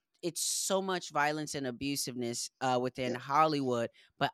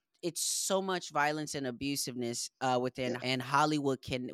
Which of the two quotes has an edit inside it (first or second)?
second